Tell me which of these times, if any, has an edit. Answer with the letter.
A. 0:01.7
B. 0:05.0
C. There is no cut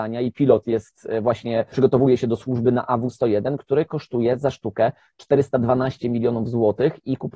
A